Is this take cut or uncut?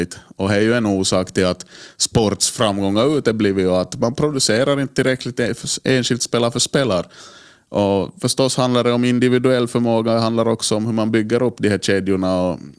uncut